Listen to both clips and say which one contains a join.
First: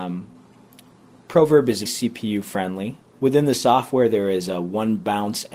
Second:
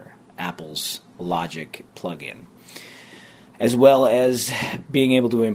first; 2 cuts; at 1.9 s, 3.0 s

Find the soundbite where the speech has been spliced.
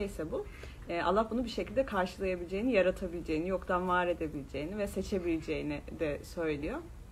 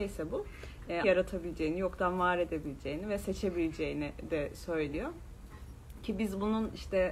second; 1 cut; at 1.0 s

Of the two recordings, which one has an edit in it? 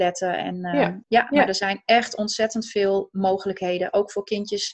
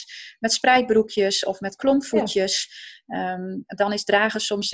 first; 1 cut; at 1.0 s

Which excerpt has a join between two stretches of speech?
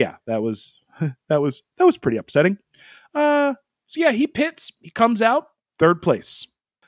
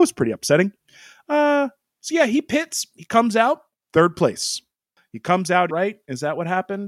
second; 1 cut; at 5.7 s

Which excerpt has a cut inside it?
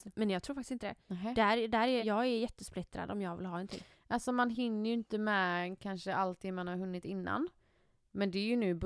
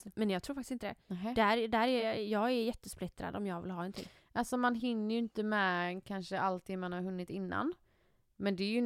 first; 1 cut; at 2.0 s

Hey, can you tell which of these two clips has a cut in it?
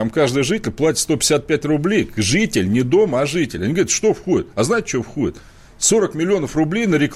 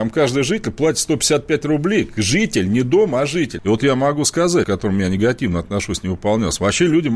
second; 2 cuts; at 3.6 s, 4.6 s

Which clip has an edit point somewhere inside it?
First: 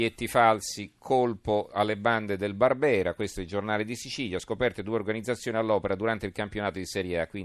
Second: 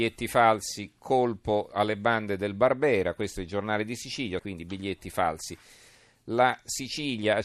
second; 1 cut; at 4.4 s

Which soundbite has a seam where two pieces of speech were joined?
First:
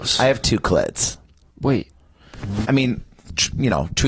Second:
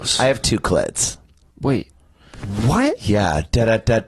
first; 1 cut; at 2.6 s

